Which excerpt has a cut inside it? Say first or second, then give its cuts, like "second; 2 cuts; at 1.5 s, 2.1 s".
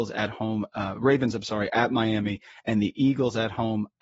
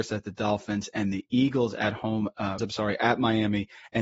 second; 1 cut; at 2.6 s